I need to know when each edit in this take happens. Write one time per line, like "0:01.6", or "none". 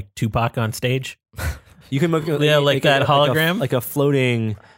none

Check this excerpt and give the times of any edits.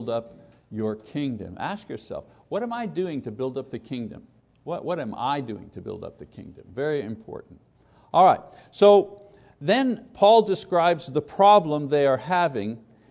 none

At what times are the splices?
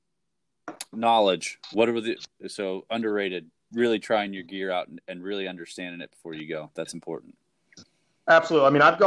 none

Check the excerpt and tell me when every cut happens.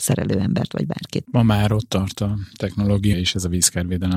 0:01.2
0:03.1

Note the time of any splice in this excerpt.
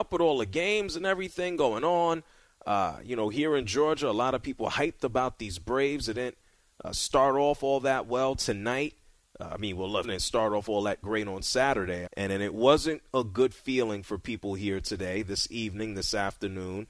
0:10.0
0:12.1

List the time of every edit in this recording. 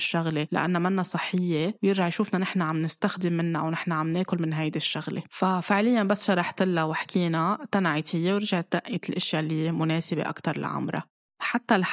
0:05.3

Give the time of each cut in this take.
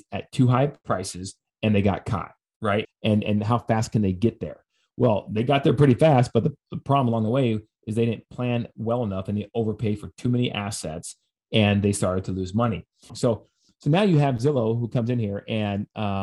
0:02.8
0:13.1

